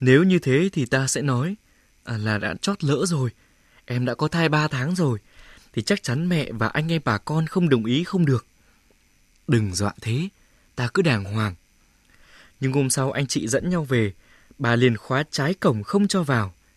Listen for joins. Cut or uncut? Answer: cut